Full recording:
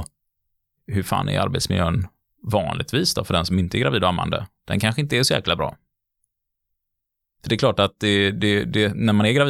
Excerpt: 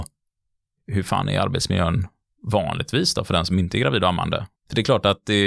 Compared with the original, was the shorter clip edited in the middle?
yes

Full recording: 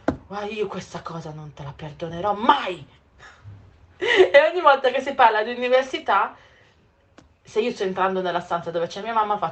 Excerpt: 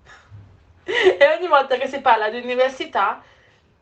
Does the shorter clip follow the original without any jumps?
yes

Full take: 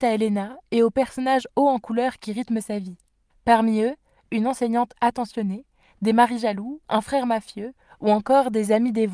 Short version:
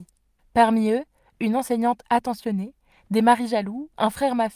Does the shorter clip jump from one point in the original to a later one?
no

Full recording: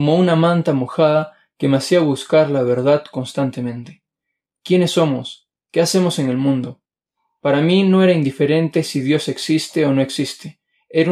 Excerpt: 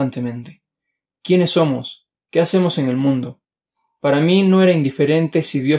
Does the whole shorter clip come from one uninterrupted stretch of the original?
yes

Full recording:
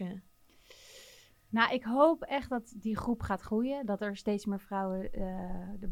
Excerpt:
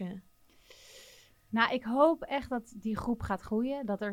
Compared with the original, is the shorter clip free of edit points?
yes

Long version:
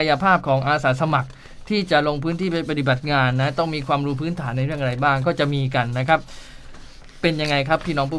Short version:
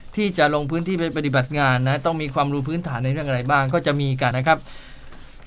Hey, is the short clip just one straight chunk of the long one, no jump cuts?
no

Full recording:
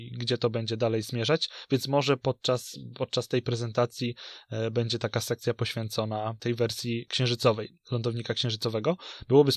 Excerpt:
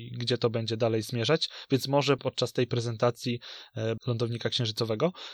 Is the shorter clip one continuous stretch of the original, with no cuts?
no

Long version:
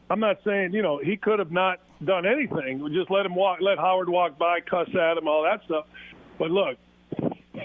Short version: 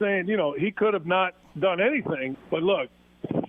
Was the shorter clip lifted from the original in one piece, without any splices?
no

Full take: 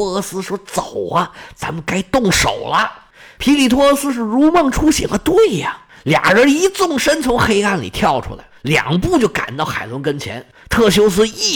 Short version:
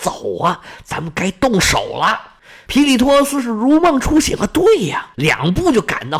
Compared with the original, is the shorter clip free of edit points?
no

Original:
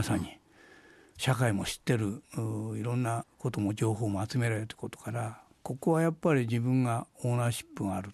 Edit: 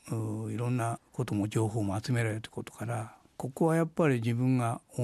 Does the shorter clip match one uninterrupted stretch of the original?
yes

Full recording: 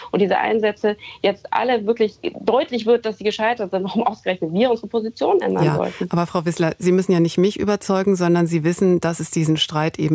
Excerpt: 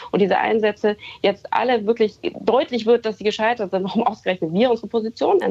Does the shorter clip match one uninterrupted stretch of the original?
yes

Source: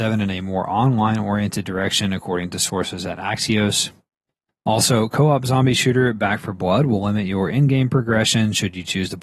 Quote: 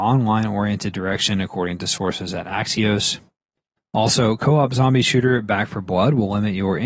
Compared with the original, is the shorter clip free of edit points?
yes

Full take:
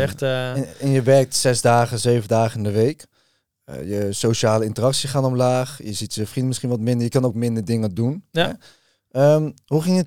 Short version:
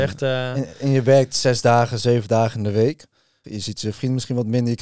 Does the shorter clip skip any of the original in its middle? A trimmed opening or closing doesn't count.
yes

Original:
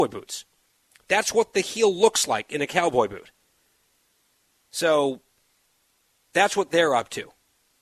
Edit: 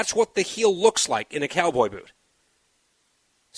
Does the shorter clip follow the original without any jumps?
yes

